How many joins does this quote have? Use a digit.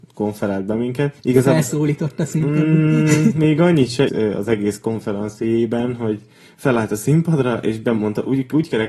2